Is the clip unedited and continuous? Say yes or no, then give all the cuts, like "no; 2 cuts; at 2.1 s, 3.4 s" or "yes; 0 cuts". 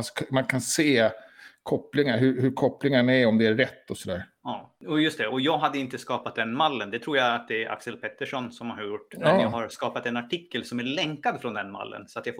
yes; 0 cuts